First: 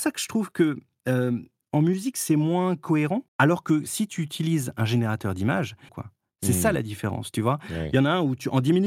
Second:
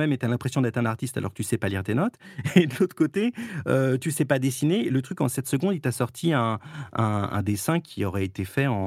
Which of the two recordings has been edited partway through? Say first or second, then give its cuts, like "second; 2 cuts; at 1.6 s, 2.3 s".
first; 2 cuts; at 3.3 s, 5.9 s